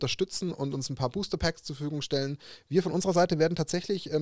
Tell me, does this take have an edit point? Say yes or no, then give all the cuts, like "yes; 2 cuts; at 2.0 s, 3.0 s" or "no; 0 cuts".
no; 0 cuts